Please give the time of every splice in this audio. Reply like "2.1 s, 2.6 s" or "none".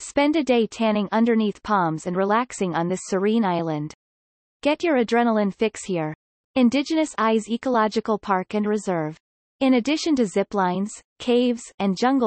4.4 s